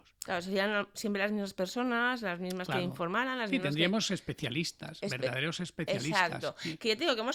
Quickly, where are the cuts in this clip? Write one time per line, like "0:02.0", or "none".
none